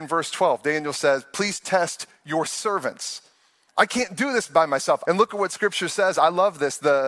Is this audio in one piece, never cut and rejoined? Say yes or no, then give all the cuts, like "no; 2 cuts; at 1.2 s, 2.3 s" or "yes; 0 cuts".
no; 2 cuts; at 3.7 s, 5.0 s